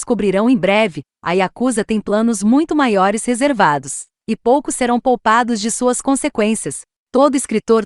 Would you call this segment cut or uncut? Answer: uncut